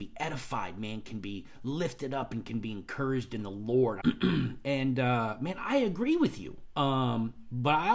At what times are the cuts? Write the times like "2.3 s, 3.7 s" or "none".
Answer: 4.0 s, 6.7 s

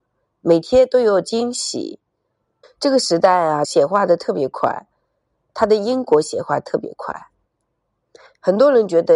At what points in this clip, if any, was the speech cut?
2.6 s, 3.6 s

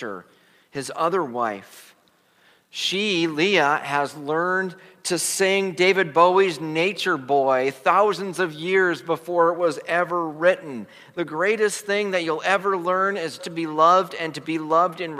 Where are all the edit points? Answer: 13.4 s

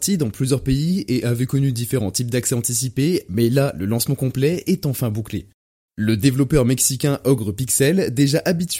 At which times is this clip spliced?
5.9 s

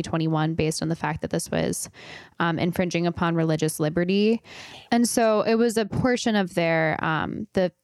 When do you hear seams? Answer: 4.9 s

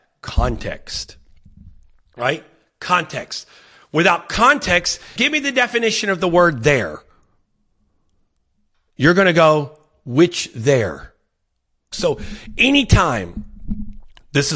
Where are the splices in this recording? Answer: 5.2 s, 11.9 s

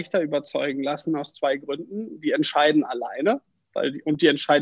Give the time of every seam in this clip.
none

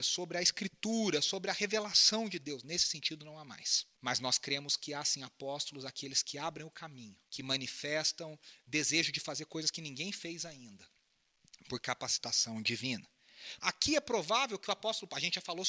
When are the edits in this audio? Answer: 3.9 s, 7.3 s, 13.6 s

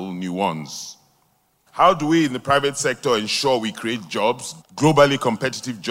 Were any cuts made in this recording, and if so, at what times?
1.7 s, 4.6 s

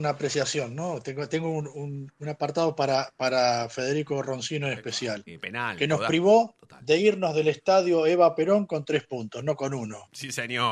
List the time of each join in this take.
5.3 s

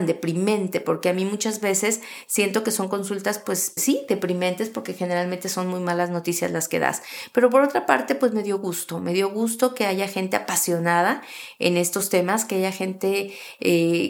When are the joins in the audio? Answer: 3.8 s

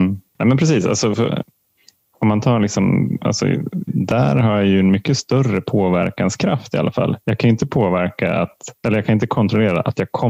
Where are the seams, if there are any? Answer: 3.9 s

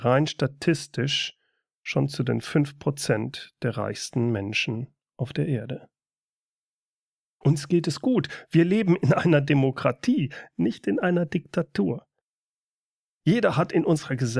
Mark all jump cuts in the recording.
none

